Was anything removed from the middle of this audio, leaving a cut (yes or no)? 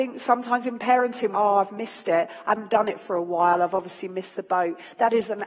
yes